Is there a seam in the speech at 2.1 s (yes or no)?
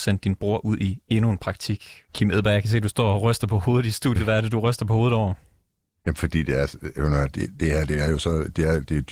yes